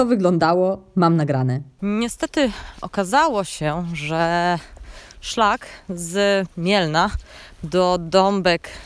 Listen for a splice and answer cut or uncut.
cut